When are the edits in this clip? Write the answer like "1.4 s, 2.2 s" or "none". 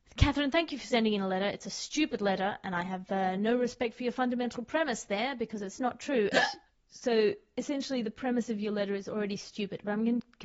6.3 s